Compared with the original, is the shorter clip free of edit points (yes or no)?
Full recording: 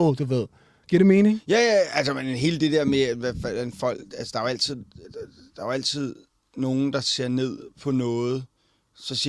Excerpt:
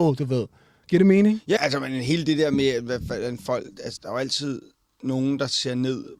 no